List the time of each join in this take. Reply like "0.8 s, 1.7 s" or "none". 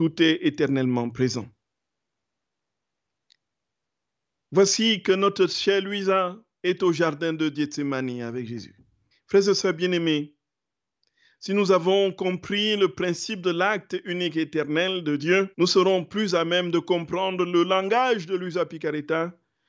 9.1 s, 15.5 s